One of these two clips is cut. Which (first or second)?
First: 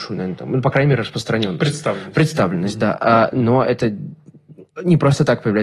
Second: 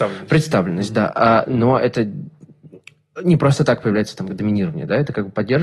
first